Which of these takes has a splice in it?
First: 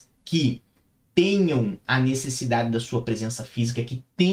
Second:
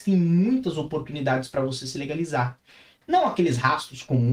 second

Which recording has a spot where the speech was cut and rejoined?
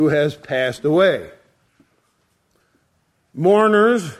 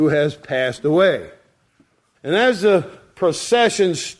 second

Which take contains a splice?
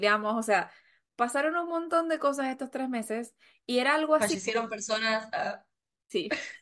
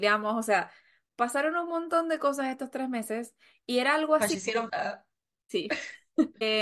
second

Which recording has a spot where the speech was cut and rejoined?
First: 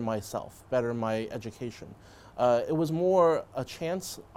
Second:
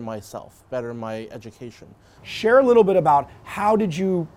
second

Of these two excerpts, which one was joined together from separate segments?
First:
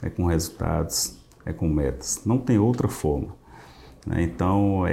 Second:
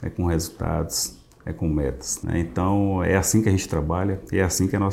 second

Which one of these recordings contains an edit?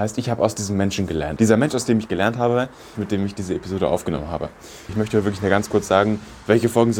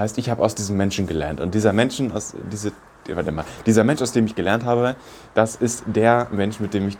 first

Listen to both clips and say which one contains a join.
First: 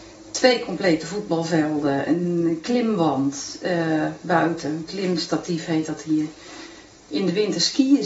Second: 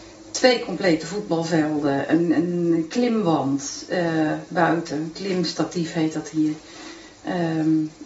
first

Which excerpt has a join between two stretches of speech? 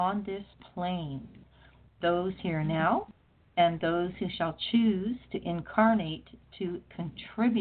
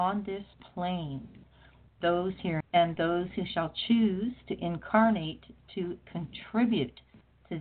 second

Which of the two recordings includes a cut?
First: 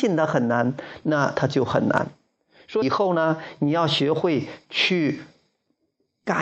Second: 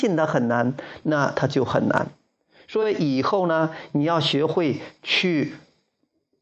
first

